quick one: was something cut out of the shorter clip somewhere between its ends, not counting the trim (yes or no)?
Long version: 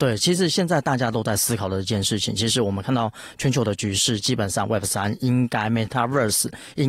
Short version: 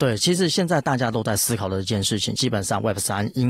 yes